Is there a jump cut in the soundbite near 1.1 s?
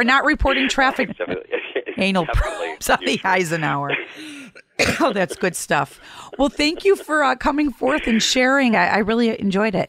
yes; 2 cuts; at 1.1 s, 8.7 s

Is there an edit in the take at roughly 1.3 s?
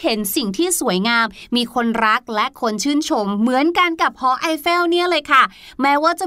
no; 0 cuts

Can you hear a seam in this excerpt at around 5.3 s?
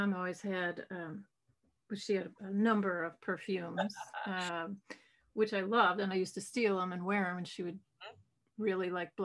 no; 1 cut; at 2.4 s

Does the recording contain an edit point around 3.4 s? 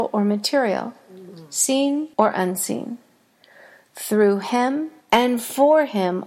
no; 2 cuts; at 2.1 s, 5.0 s

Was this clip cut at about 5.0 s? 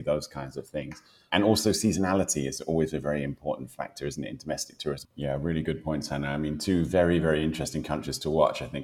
yes; 1 cut; at 5.0 s

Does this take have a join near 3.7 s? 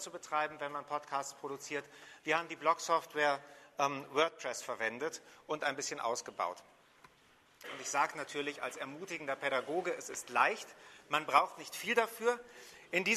no; 1 cut; at 7.6 s

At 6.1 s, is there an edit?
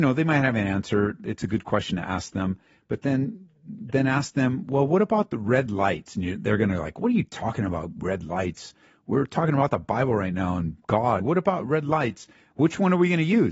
no; 2 cuts; at 11.2 s, 12.5 s

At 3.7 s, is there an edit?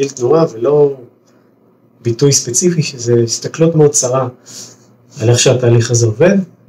yes; 1 cut; at 3.7 s

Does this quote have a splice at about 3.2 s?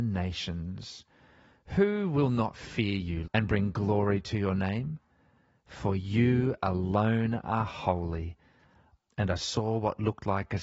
yes; 2 cuts; at 3.2 s, 8.9 s

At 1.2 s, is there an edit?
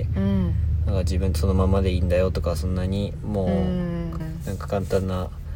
no; 1 cut; at 4.2 s

